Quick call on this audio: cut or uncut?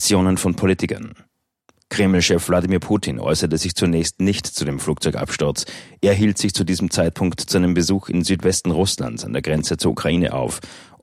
uncut